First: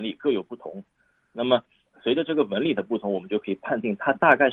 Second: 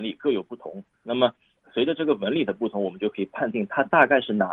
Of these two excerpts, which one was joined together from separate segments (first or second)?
second